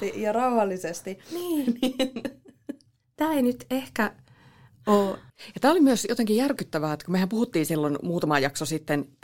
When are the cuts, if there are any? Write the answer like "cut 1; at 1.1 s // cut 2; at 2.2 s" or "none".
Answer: cut 1; at 5.3 s